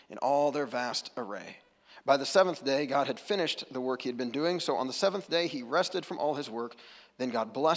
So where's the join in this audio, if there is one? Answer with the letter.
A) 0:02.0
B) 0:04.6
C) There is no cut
C